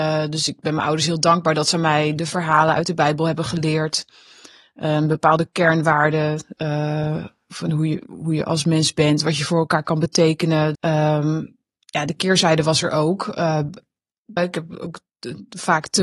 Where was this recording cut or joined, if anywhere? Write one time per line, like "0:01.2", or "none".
0:10.7
0:14.4